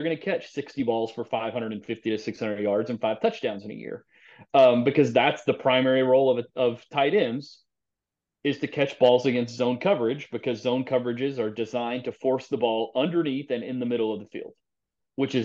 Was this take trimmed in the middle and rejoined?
no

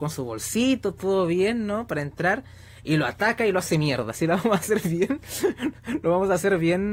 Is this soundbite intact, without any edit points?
yes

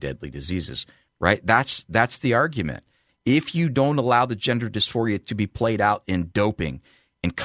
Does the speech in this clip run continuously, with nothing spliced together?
no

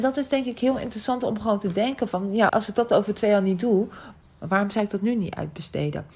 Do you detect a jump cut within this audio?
yes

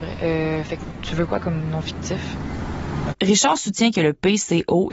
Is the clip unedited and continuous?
no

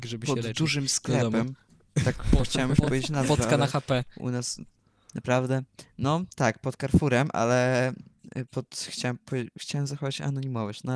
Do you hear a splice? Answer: no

